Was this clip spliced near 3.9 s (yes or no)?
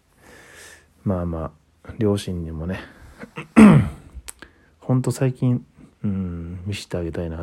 no